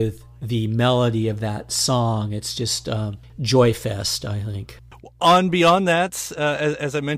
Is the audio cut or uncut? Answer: uncut